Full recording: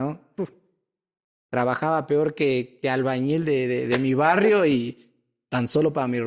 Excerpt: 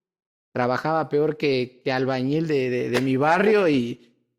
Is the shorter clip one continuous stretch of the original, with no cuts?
yes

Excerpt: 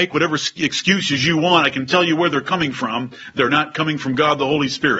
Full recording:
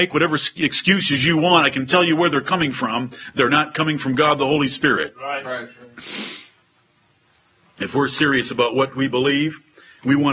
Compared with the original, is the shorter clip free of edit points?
yes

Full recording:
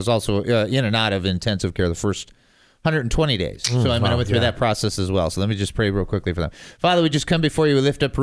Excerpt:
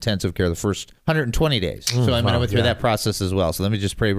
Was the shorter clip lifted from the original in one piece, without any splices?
no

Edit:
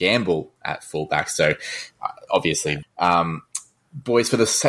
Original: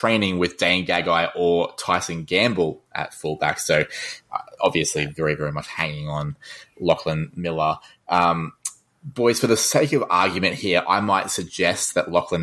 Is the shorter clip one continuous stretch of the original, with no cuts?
no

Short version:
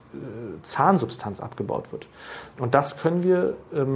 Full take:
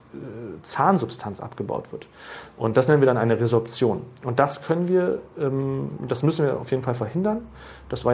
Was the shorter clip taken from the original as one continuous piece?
no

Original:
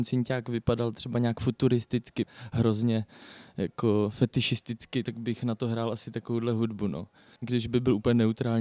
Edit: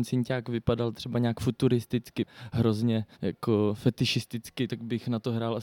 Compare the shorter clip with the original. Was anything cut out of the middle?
yes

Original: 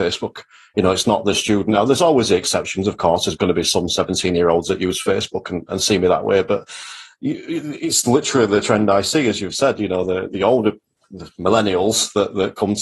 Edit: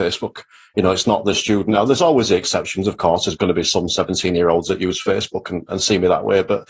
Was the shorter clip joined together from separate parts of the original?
no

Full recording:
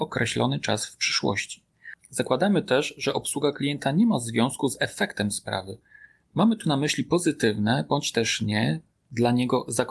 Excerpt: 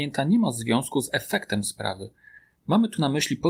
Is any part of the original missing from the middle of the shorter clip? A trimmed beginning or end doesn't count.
no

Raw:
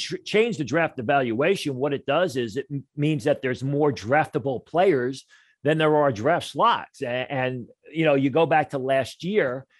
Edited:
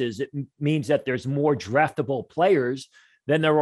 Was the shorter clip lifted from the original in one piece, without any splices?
yes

